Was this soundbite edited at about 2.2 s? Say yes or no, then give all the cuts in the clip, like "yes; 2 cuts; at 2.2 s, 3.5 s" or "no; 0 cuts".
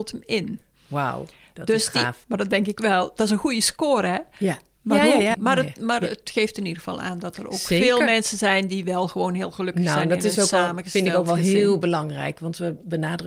yes; 2 cuts; at 2.2 s, 5.3 s